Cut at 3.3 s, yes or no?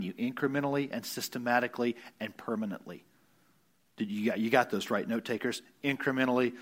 no